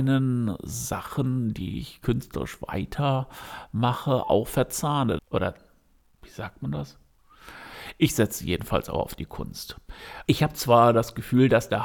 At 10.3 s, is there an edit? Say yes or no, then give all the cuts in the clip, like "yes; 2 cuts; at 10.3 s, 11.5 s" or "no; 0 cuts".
yes; 2 cuts; at 5.2 s, 10.3 s